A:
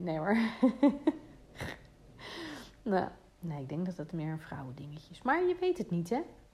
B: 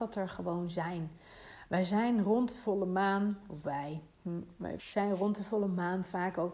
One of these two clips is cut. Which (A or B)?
B